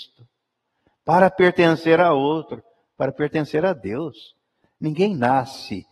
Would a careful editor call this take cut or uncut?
uncut